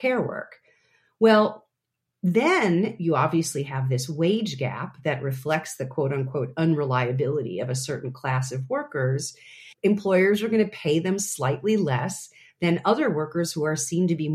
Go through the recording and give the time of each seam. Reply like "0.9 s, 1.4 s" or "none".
9.7 s